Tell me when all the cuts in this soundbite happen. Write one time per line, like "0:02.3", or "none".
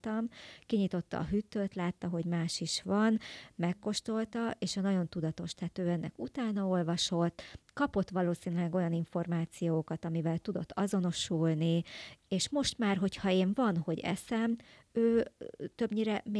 none